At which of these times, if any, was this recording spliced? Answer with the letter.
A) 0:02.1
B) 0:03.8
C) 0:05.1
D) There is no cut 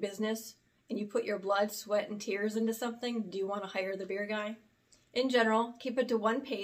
C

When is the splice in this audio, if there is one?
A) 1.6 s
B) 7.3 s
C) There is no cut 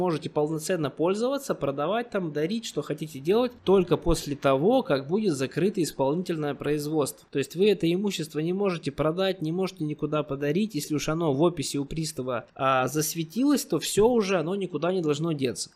B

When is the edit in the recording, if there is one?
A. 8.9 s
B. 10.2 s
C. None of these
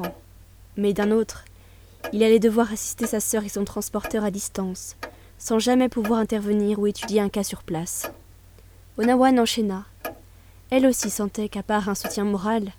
C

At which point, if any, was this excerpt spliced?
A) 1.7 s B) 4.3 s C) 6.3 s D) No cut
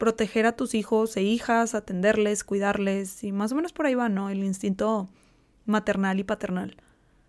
D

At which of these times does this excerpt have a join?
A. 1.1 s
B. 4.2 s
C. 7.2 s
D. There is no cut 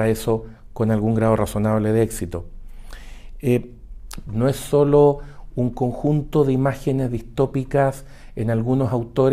B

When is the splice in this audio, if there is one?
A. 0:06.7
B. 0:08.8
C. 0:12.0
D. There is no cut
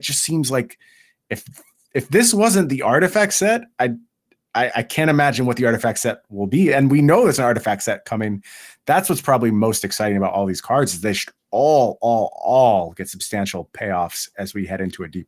D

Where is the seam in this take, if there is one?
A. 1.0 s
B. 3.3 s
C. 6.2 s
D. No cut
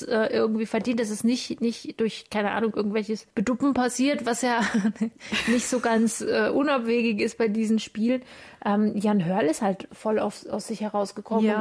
B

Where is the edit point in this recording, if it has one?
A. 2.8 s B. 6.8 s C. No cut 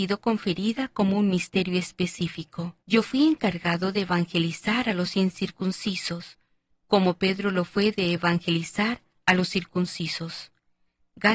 A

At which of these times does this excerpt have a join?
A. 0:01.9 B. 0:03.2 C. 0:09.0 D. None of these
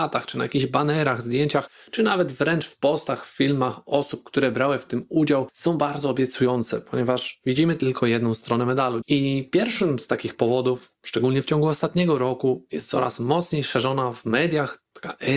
C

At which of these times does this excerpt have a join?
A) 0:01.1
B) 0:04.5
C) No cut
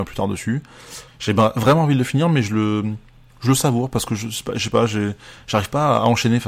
A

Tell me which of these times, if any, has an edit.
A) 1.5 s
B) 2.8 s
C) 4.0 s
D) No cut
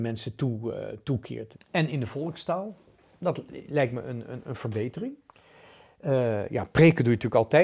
A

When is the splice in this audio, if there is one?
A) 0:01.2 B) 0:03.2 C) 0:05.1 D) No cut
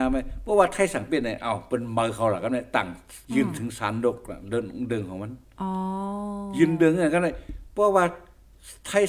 B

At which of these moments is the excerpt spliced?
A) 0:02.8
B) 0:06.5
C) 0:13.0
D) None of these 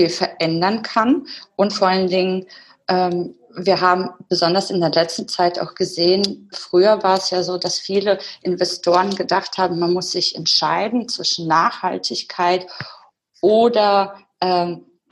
B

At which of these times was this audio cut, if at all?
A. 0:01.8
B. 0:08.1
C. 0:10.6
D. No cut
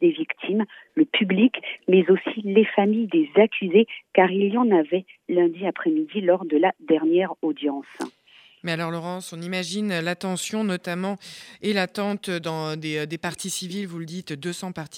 D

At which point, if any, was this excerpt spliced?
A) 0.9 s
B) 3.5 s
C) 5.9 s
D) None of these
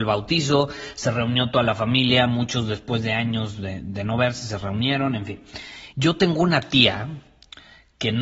C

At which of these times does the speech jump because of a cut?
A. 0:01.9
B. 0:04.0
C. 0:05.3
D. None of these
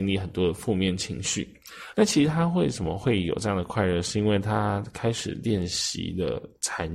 A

